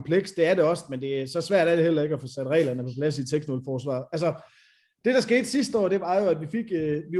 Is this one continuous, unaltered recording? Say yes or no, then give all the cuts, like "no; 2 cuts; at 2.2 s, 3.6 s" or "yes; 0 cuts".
yes; 0 cuts